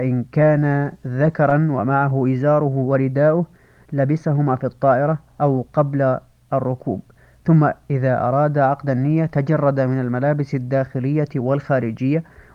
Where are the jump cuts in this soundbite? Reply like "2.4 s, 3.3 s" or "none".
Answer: none